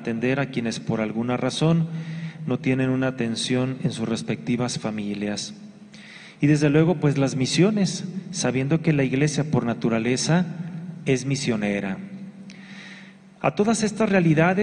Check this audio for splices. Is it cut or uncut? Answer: uncut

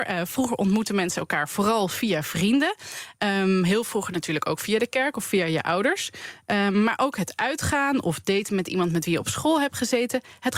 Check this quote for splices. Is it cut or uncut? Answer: uncut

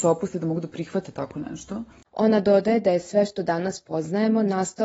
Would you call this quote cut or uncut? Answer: uncut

